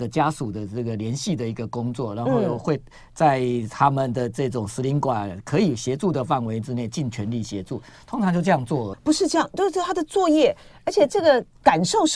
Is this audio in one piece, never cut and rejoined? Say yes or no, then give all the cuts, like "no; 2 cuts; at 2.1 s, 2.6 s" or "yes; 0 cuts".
no; 1 cut; at 8.9 s